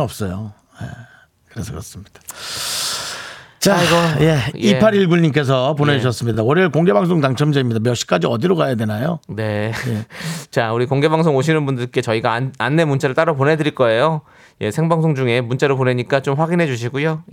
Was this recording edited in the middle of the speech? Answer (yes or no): no